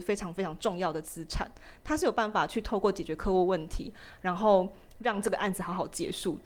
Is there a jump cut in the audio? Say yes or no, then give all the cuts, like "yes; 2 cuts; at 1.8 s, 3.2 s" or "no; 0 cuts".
no; 0 cuts